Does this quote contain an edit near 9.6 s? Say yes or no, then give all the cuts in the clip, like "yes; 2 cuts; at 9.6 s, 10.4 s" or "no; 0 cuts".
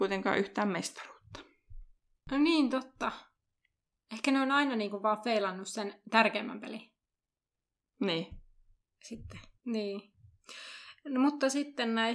yes; 1 cut; at 9.6 s